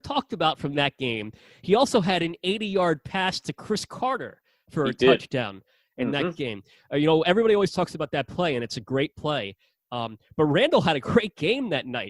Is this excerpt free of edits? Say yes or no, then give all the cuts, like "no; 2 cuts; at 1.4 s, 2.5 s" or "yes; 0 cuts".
yes; 0 cuts